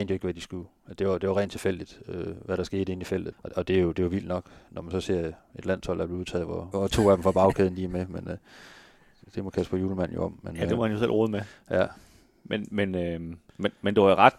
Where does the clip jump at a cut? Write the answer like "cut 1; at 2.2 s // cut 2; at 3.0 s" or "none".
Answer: cut 1; at 3.3 s // cut 2; at 6.7 s